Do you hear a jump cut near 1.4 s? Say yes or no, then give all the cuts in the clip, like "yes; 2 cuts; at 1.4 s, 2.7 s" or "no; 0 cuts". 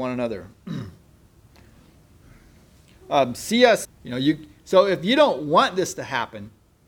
no; 1 cut; at 3.8 s